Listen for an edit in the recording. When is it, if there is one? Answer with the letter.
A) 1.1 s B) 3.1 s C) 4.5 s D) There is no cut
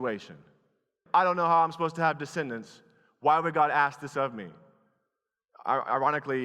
A